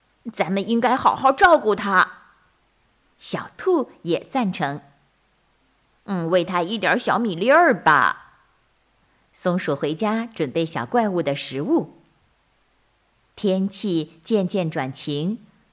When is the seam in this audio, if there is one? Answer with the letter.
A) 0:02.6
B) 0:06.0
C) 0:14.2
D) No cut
A